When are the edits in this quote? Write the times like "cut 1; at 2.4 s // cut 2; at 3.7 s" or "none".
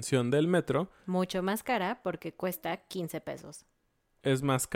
none